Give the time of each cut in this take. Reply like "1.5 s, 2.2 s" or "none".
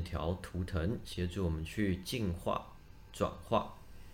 none